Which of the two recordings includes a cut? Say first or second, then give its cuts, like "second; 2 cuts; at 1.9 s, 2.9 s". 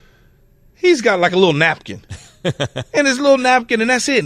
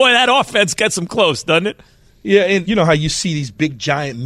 second; 1 cut; at 2.6 s